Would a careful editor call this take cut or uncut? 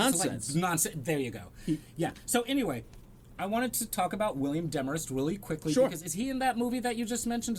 uncut